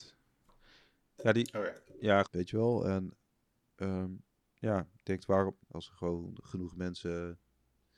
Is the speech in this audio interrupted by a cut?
yes; 2 cuts; at 2.2 s, 5.6 s

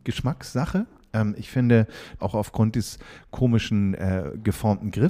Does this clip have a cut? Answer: yes; 1 cut; at 2.2 s

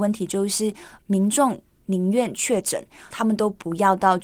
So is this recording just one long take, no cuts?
no; 2 cuts; at 1.0 s, 3.1 s

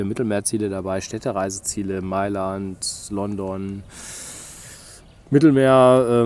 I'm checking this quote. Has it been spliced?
no; 0 cuts

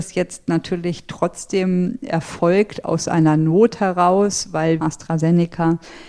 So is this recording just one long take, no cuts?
no; 1 cut; at 4.8 s

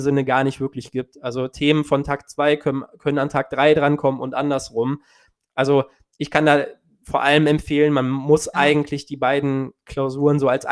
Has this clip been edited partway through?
no; 0 cuts

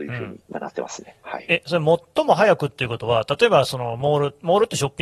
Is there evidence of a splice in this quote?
no; 0 cuts

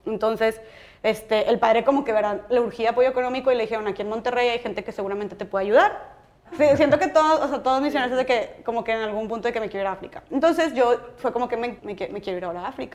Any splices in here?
yes; 2 cuts; at 6.4 s, 11.8 s

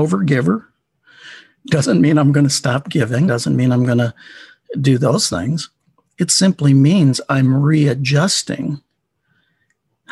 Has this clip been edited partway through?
yes; 1 cut; at 3.3 s

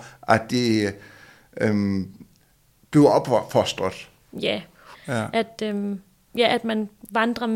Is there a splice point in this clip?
yes; 1 cut; at 4.9 s

